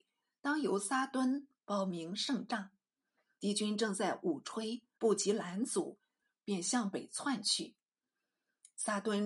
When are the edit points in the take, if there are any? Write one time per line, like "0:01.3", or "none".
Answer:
0:03.4
0:05.0